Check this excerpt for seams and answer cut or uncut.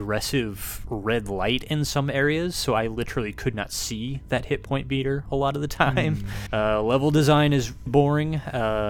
cut